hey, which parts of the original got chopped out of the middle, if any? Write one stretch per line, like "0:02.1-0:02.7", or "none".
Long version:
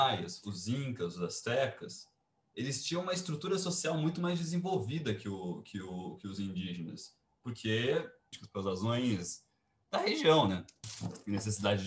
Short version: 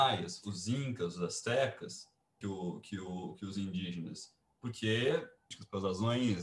0:02.4-0:05.2